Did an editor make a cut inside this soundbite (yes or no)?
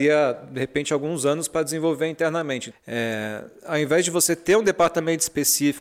yes